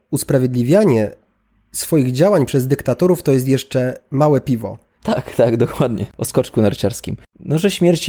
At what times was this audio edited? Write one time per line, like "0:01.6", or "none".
0:04.9